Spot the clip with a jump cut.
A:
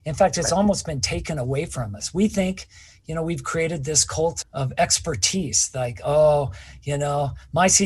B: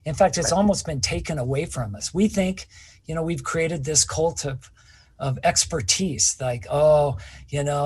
A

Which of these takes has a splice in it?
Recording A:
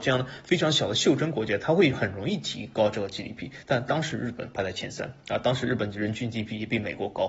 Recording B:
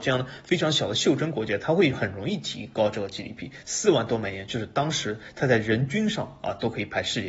B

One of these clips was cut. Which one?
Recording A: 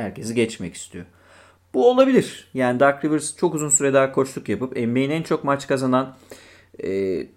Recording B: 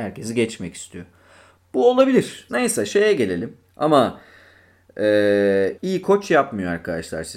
B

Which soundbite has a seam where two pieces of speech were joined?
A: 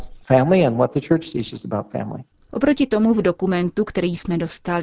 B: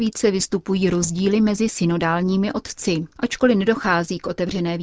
A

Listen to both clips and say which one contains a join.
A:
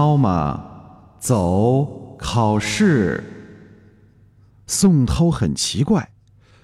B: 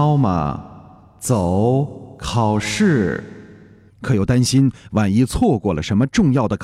B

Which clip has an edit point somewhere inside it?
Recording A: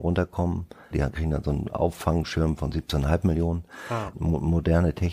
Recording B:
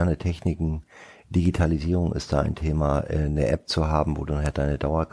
A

